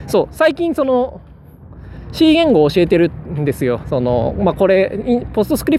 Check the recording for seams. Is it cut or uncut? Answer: cut